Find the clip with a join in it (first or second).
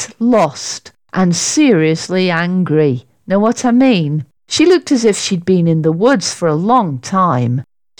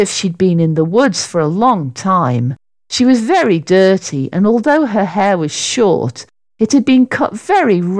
first